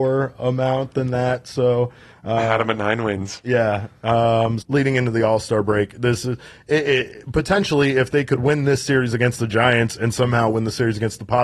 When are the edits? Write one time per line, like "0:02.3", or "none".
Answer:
0:04.6